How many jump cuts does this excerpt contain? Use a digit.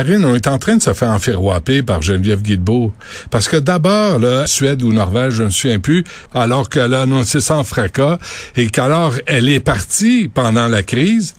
2